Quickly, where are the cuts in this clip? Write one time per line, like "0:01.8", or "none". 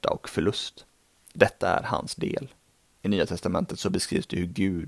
0:03.0